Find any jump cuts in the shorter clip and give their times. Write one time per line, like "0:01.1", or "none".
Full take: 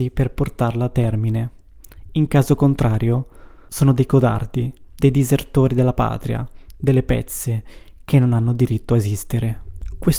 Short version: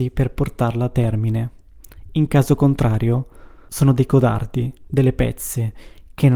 0:04.9